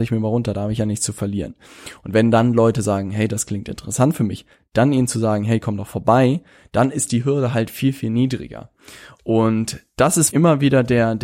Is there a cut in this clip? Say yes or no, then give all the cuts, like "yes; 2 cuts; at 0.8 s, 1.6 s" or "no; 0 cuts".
yes; 1 cut; at 10.3 s